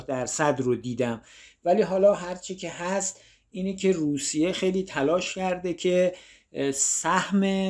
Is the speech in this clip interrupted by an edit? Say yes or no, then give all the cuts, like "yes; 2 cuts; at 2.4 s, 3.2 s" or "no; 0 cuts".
no; 0 cuts